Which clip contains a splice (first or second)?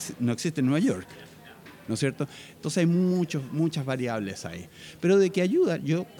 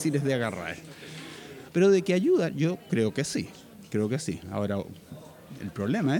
second